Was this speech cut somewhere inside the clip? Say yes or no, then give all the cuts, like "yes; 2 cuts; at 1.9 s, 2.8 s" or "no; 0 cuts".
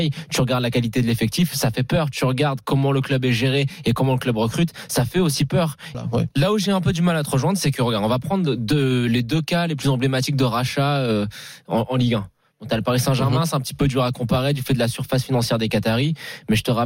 yes; 1 cut; at 5.9 s